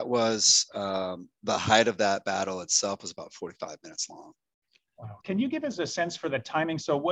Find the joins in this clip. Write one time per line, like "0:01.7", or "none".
0:05.2